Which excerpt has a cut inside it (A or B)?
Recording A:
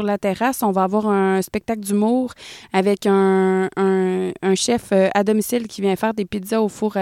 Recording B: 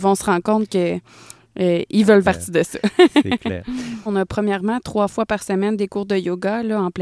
B